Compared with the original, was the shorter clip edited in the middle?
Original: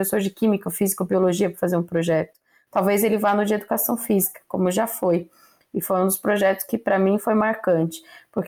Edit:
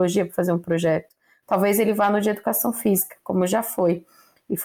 no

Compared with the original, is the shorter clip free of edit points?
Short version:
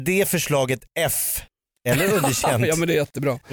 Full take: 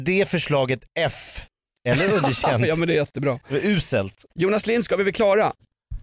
yes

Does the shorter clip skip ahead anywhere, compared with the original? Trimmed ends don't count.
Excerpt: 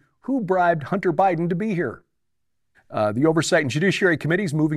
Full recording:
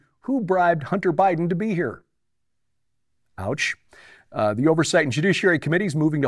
yes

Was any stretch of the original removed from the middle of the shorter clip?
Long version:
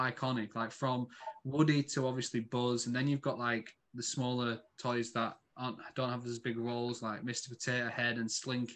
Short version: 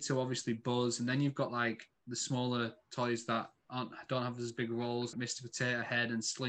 yes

